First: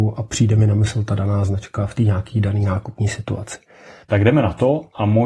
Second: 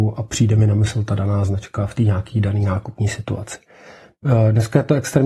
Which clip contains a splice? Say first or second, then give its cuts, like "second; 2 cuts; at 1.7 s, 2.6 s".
first; 1 cut; at 4.0 s